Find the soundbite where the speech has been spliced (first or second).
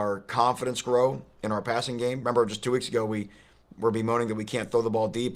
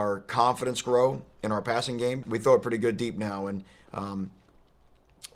second